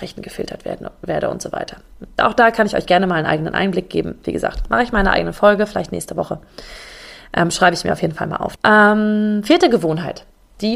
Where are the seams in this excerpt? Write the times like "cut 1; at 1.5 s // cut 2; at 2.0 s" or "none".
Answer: cut 1; at 8.6 s